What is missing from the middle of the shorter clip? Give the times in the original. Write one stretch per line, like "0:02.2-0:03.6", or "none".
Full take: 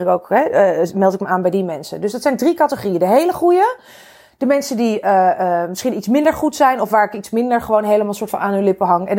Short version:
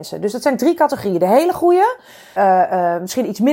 0:04.2-0:05.0